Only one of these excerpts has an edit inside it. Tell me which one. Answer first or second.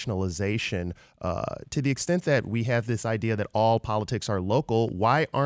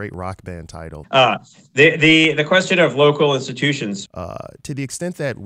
second